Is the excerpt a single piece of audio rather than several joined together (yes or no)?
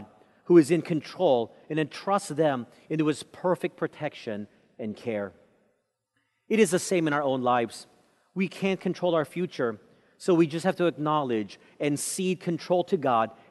yes